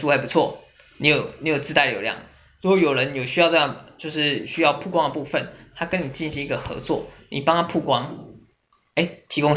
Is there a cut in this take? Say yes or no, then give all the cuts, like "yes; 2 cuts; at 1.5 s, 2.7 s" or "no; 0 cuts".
no; 0 cuts